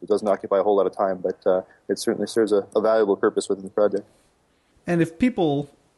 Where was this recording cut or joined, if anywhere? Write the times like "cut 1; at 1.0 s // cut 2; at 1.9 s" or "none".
none